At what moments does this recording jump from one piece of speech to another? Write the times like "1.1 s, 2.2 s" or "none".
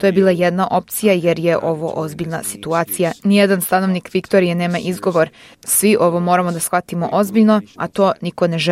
7.8 s